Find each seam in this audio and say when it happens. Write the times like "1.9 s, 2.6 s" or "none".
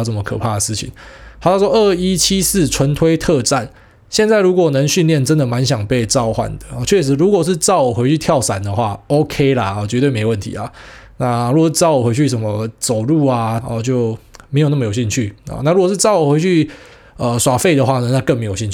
13.6 s